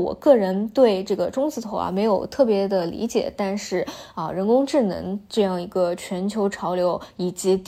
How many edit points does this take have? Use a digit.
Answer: 0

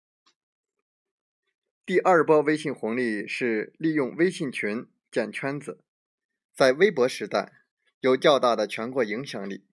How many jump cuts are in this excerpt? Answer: 1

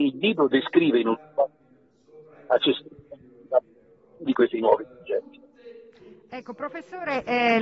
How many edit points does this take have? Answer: 0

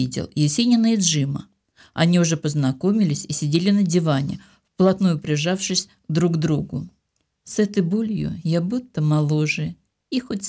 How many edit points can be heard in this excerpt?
1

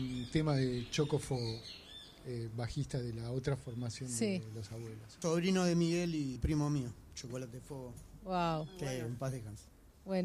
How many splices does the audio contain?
2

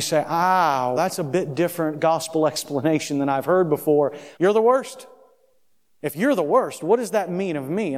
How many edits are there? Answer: 2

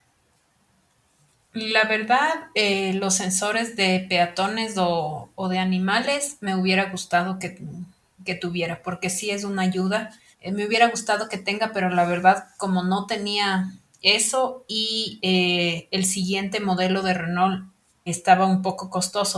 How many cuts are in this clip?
2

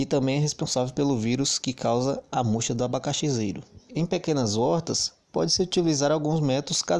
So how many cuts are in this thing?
1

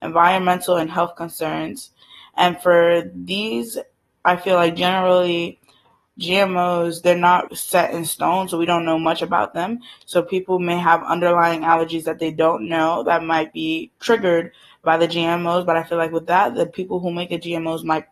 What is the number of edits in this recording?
2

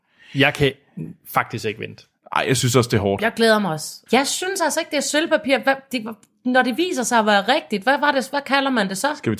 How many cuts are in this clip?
1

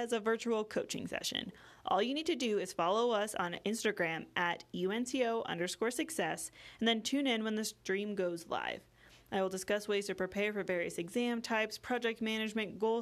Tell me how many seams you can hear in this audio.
0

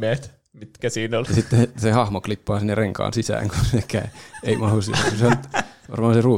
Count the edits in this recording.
1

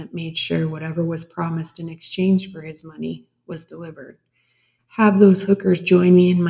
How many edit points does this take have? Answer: 1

